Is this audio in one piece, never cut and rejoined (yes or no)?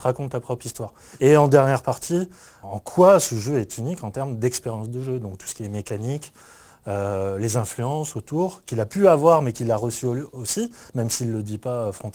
no